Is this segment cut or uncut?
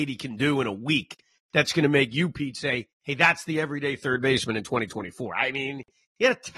uncut